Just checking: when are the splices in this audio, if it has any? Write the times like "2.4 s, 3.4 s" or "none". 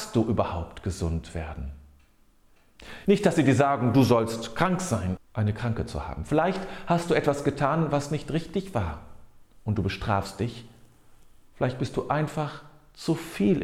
3.1 s, 5.2 s